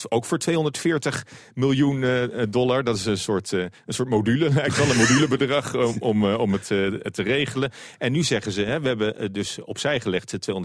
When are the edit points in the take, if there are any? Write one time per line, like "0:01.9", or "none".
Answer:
none